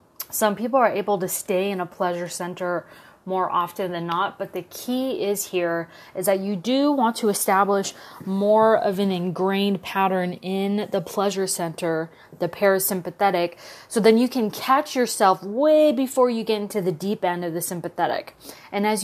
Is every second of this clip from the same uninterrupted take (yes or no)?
yes